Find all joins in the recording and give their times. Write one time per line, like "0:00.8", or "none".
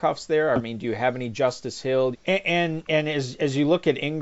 0:02.1

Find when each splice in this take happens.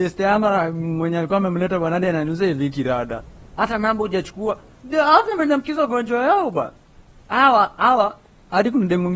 none

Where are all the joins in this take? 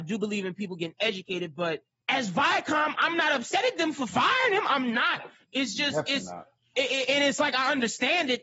none

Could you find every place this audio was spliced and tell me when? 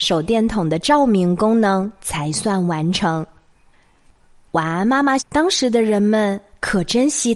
0:05.2

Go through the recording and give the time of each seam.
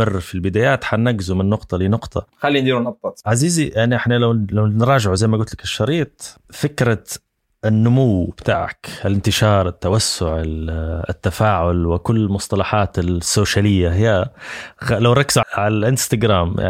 0:06.4
0:15.4

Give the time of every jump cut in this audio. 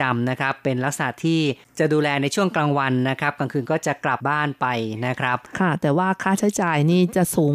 0:04.2

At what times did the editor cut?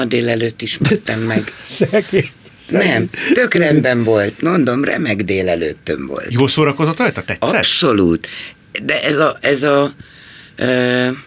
none

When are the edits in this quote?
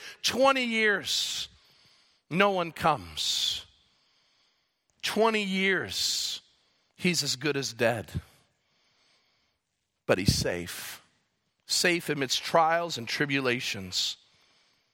none

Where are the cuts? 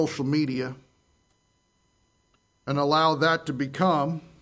none

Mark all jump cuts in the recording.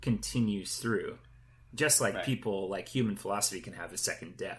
none

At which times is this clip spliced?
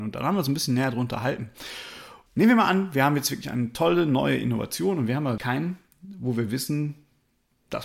0:02.3
0:05.4

